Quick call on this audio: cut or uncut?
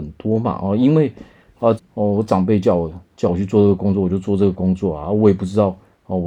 cut